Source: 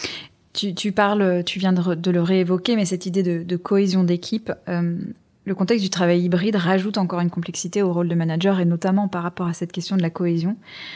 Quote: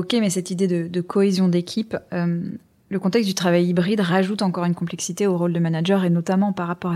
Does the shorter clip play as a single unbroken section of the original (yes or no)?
yes